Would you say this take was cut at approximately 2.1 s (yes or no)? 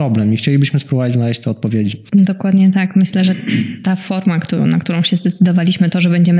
no